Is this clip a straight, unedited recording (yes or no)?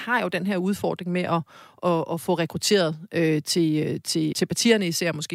no